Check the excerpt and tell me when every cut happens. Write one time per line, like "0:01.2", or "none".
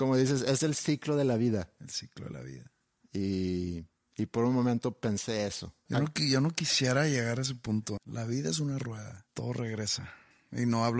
0:05.9
0:08.0
0:09.3

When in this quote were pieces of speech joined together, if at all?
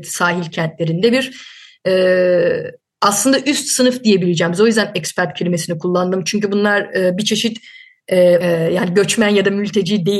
0:08.4

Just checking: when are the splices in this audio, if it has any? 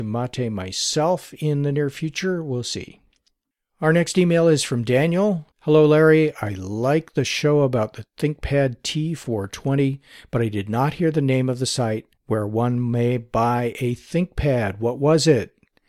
0:05.5
0:12.2

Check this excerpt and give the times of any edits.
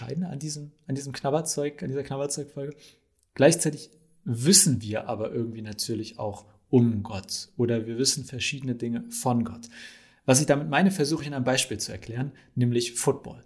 none

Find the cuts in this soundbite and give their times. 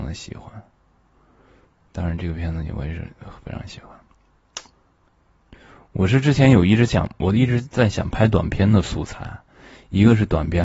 none

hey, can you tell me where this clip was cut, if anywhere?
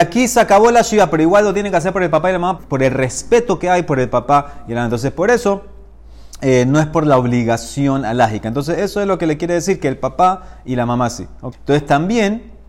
0:02.6
0:11.5

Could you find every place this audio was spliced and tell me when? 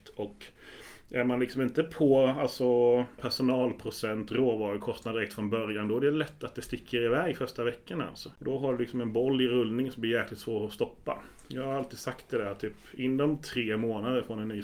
0:03.2

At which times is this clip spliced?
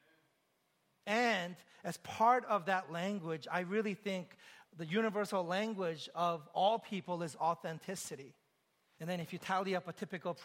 0:01.0
0:04.6
0:09.0

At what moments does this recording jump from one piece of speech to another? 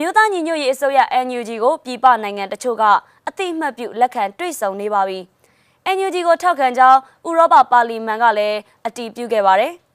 none

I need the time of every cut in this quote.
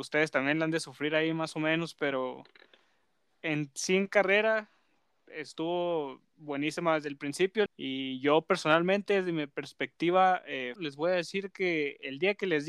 0:07.7
0:10.8

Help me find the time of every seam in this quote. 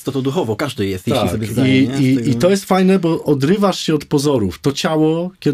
none

